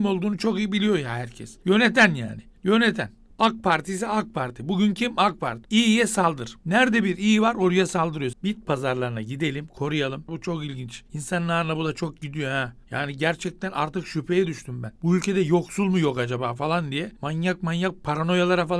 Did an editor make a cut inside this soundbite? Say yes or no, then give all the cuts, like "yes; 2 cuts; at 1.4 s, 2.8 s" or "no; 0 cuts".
yes; 3 cuts; at 5.6 s, 8.3 s, 10.3 s